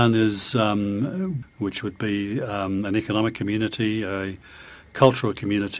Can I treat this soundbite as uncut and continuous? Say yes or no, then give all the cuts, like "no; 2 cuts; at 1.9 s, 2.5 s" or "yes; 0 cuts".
no; 1 cut; at 1.4 s